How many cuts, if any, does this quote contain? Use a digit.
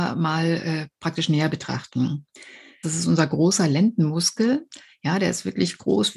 1